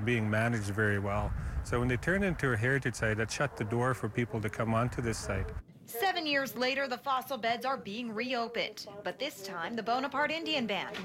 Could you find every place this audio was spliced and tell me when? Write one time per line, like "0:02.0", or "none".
none